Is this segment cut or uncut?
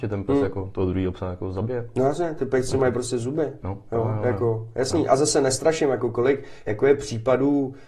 uncut